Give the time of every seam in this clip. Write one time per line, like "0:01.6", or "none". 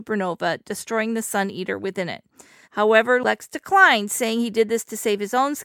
0:02.6